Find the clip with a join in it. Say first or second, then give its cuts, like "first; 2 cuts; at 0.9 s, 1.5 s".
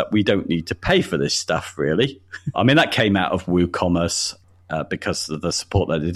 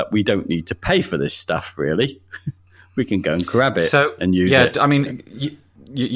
first; 1 cut; at 2.5 s